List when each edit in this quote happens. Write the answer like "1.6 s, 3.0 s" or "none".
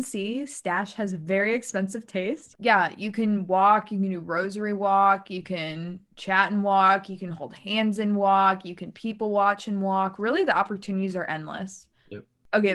2.5 s